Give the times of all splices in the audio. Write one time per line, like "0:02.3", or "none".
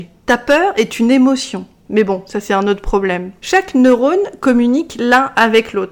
0:01.8
0:03.4